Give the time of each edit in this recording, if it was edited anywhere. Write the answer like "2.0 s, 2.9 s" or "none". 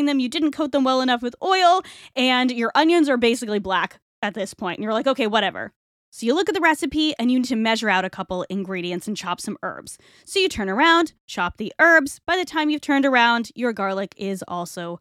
6.0 s, 11.2 s